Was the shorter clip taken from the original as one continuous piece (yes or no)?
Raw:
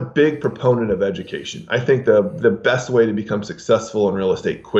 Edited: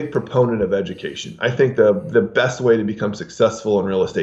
yes